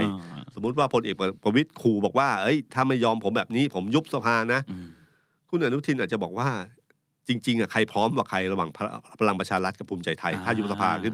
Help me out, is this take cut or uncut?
uncut